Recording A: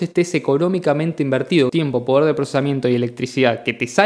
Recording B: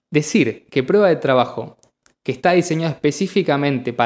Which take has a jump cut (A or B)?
A